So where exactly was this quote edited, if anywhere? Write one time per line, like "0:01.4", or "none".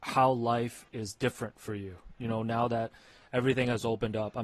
none

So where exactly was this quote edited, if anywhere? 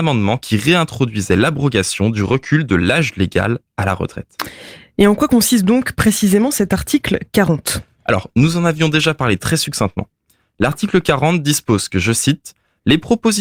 none

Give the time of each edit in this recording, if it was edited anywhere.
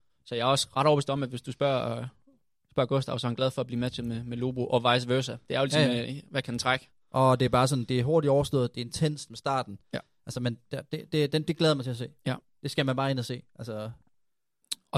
0:06.0

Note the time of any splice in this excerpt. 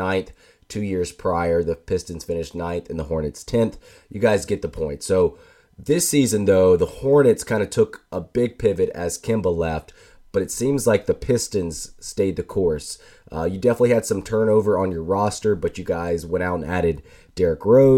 none

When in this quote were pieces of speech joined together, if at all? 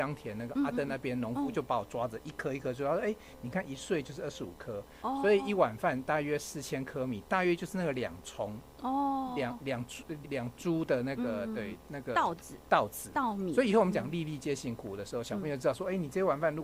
0:10.2

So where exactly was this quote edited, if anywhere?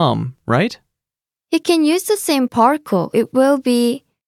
0:01.4
0:03.1

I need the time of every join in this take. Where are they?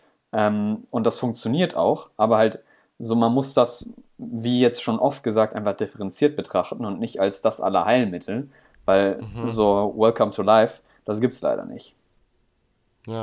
none

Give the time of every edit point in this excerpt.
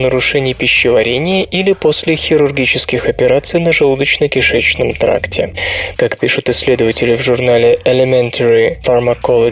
0:06.0

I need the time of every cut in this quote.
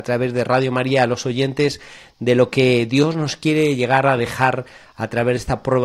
none

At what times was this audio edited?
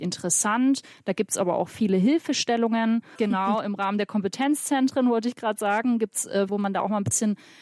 0:03.2
0:06.5

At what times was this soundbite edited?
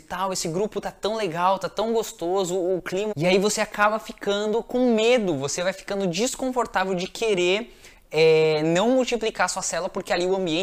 0:03.1

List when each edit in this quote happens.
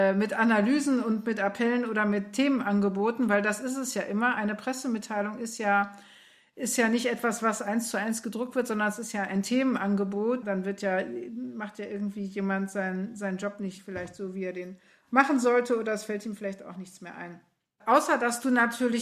0:10.4

